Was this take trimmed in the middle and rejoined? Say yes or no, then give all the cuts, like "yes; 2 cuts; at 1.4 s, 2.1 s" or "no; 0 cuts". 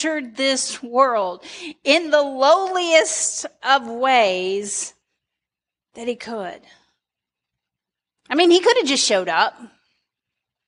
no; 0 cuts